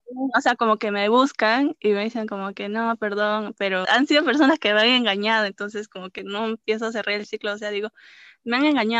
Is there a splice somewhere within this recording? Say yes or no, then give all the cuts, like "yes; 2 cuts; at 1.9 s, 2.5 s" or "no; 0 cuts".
yes; 1 cut; at 3.8 s